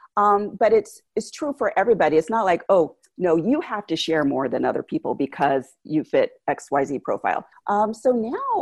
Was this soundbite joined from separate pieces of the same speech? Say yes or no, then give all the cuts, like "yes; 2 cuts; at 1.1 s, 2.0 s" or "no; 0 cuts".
yes; 1 cut; at 7.5 s